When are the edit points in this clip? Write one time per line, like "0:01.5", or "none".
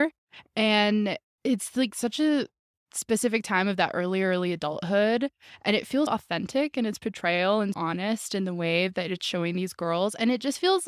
0:06.1
0:07.7